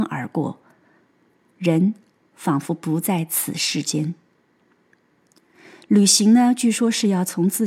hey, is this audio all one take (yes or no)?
yes